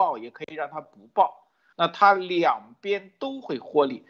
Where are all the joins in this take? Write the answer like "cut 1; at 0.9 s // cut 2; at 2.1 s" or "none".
cut 1; at 1.7 s